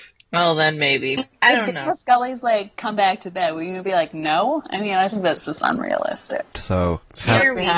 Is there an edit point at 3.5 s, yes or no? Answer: no